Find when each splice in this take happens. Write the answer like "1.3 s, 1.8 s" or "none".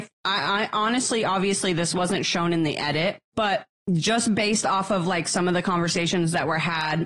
3.3 s